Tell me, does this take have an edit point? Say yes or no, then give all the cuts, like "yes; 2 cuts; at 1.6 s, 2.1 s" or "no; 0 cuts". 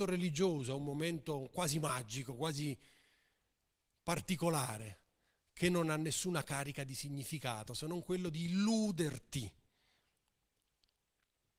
no; 0 cuts